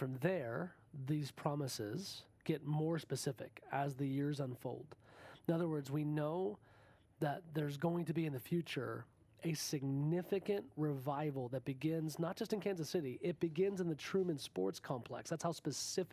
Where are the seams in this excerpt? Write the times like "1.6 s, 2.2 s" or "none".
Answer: none